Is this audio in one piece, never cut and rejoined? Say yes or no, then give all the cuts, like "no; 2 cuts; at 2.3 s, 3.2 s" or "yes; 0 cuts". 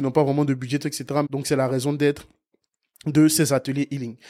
no; 1 cut; at 1.3 s